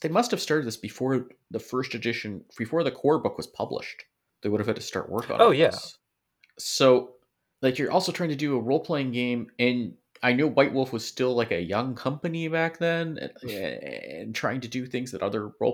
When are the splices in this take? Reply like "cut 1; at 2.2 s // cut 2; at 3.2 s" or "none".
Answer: none